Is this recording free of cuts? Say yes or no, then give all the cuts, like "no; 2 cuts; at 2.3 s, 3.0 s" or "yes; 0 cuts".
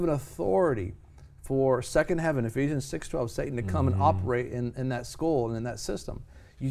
yes; 0 cuts